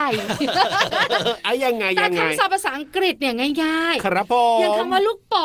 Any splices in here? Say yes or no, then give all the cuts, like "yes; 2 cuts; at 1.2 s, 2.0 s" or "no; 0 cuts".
no; 0 cuts